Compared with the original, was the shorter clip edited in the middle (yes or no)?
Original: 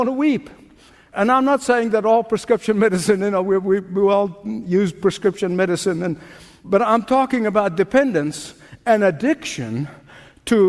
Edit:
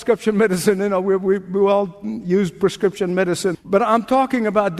yes